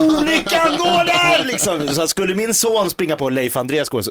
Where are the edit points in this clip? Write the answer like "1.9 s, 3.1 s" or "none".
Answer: none